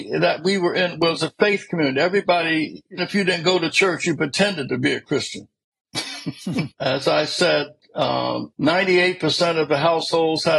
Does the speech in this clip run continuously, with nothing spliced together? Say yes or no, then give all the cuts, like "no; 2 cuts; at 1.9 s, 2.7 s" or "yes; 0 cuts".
no; 3 cuts; at 3.0 s, 6.7 s, 8.5 s